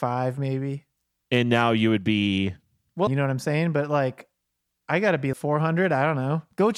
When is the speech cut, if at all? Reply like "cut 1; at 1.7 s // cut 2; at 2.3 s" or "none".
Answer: cut 1; at 3.1 s // cut 2; at 5.3 s